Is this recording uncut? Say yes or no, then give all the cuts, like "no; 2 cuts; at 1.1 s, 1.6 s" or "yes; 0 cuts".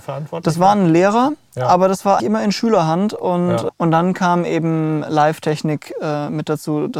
no; 2 cuts; at 2.2 s, 3.7 s